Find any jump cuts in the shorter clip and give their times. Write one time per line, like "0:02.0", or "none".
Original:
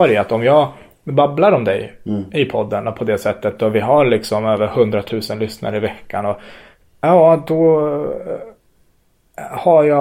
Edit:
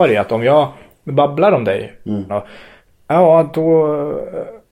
0:02.3